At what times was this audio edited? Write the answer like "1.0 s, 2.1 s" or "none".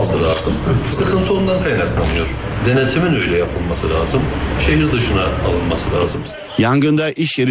none